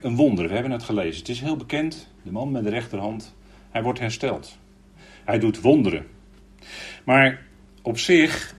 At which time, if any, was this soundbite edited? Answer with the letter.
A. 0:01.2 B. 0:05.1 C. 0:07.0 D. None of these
D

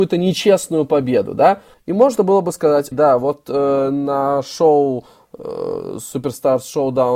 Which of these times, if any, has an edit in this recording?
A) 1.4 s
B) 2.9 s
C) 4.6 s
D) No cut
B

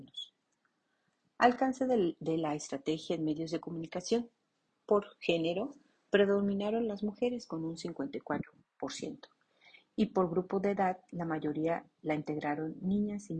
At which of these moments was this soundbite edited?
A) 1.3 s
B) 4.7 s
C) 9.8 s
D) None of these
B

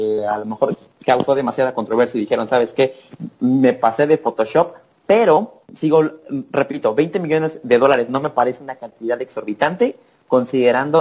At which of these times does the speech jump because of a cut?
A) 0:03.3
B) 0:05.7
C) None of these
B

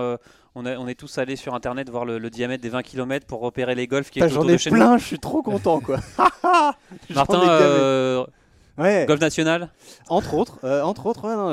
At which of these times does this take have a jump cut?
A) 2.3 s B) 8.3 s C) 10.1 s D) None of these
C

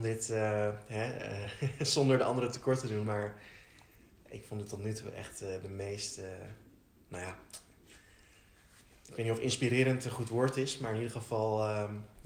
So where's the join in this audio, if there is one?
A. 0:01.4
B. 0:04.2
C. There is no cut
C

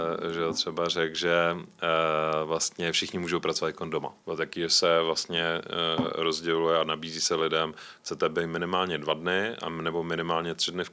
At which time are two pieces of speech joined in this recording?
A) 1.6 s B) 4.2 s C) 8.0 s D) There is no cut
B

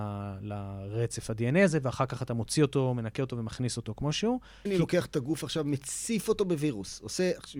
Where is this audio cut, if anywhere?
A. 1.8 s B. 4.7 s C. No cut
B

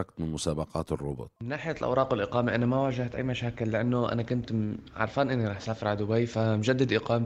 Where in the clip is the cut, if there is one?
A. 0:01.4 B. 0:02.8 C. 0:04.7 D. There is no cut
A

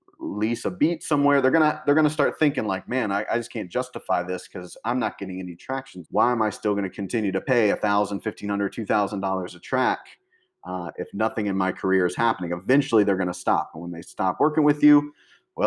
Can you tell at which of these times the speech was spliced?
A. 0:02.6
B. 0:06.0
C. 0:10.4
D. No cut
B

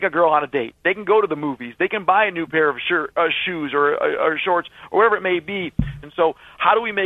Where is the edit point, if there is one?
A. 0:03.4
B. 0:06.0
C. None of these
B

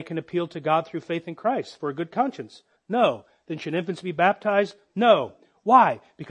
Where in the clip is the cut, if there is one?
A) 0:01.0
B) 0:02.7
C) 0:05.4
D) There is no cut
B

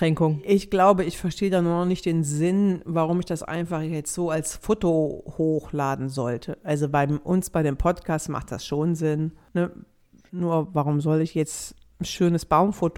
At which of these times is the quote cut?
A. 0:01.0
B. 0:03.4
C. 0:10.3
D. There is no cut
C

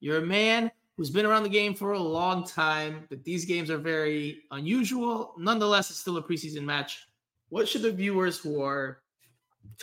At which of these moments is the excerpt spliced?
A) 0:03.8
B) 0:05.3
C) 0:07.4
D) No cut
C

